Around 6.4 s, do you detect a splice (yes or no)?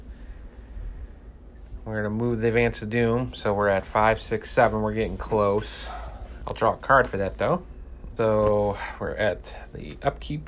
yes